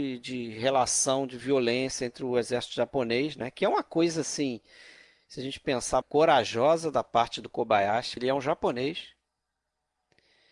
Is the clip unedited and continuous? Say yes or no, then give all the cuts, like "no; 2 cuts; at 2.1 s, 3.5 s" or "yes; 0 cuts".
no; 2 cuts; at 6.0 s, 8.2 s